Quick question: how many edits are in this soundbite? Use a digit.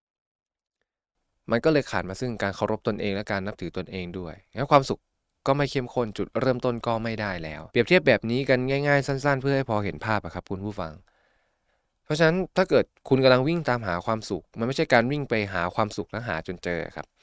1